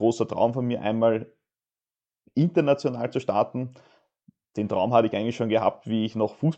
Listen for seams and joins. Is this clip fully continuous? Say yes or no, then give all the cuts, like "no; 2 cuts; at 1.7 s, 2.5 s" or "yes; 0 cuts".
yes; 0 cuts